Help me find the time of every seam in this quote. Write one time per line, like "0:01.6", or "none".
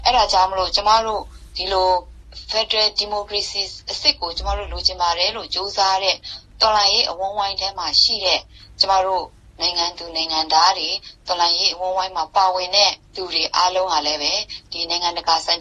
0:13.0